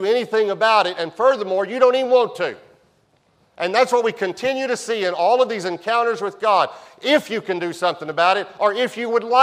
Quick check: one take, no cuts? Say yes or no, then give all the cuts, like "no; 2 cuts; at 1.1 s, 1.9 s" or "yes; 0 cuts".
yes; 0 cuts